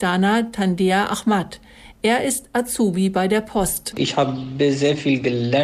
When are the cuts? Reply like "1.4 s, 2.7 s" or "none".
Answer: none